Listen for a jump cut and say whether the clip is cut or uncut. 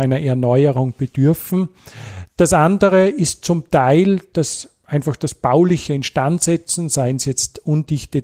uncut